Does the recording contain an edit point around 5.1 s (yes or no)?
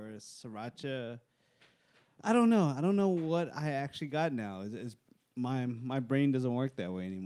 no